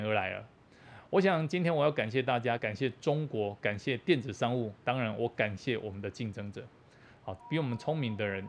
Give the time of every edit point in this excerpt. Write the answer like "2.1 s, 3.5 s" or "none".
2.6 s, 7.4 s